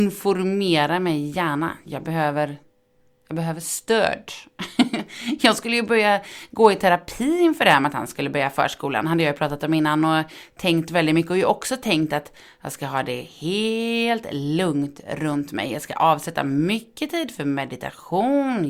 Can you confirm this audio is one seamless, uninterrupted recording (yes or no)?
yes